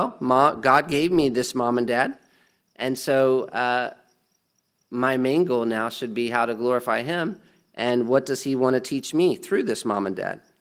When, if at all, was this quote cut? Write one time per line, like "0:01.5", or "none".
none